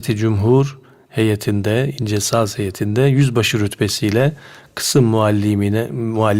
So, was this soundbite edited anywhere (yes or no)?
no